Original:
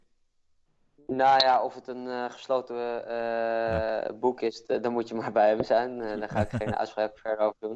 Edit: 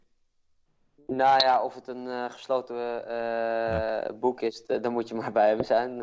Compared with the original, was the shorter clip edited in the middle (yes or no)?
no